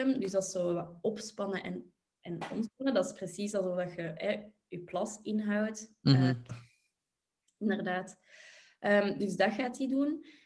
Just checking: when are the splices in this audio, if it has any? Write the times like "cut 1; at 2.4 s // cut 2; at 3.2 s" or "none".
cut 1; at 6.5 s